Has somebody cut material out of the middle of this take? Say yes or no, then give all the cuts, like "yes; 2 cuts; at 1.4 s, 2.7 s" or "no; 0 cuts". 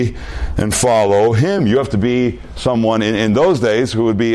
no; 0 cuts